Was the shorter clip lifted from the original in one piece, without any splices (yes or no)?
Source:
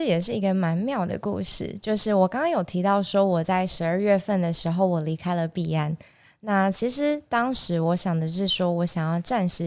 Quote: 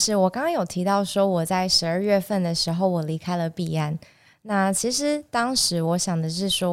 yes